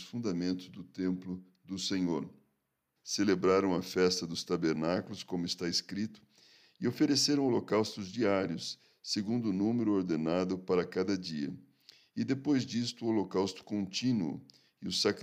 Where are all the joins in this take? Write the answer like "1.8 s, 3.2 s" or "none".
3.0 s